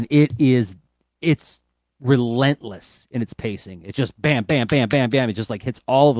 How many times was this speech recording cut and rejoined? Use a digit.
0